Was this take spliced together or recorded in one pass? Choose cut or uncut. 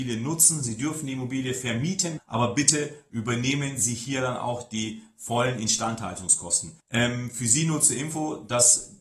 cut